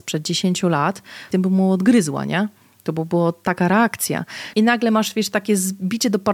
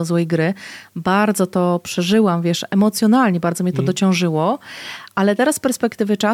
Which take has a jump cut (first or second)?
first